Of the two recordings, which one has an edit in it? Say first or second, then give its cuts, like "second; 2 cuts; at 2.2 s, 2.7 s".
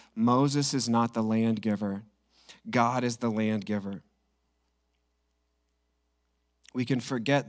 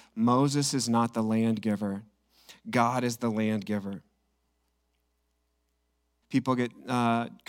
second; 1 cut; at 6.2 s